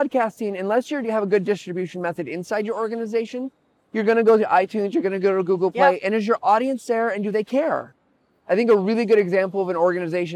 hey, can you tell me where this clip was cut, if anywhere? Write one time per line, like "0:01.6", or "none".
none